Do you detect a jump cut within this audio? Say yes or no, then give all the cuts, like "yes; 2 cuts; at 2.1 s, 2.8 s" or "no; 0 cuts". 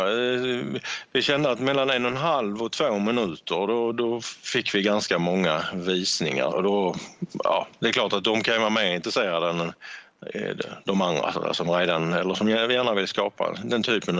yes; 1 cut; at 6.5 s